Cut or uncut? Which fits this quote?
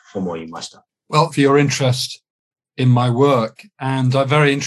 cut